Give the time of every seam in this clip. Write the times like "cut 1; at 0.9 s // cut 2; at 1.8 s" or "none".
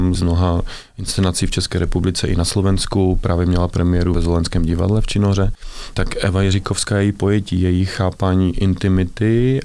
none